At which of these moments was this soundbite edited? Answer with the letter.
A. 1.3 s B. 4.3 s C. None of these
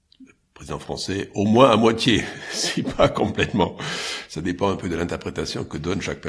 C